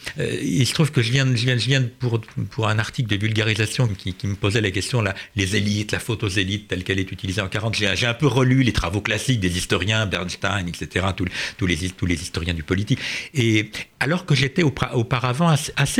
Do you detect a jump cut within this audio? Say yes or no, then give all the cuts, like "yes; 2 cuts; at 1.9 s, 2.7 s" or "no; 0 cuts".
yes; 1 cut; at 3.9 s